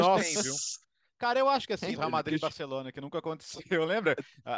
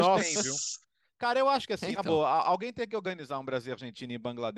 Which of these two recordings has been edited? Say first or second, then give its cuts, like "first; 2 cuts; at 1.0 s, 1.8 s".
first; 1 cut; at 2.0 s